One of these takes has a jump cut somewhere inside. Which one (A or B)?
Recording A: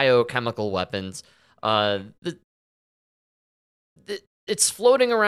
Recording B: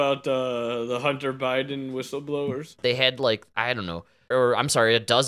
B